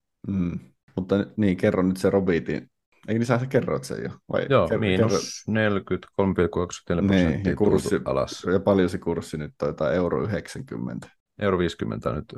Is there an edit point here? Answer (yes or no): yes